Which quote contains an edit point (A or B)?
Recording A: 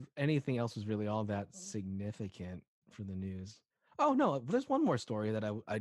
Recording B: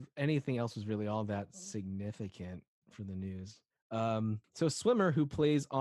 B